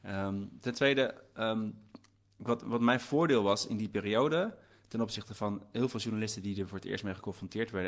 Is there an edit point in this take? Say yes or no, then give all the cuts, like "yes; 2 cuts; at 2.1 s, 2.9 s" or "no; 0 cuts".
no; 0 cuts